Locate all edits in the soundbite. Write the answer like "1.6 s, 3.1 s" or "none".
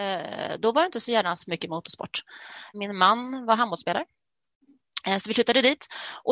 2.7 s